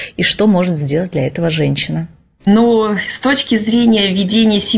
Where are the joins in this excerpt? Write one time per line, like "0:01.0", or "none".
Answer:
0:02.4